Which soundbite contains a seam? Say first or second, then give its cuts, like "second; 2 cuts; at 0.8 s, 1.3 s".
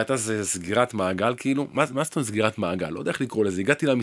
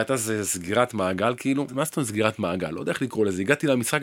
second; 1 cut; at 1.7 s